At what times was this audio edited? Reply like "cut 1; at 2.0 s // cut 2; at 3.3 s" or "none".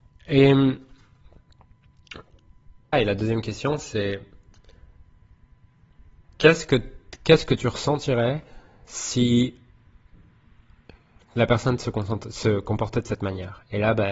cut 1; at 2.9 s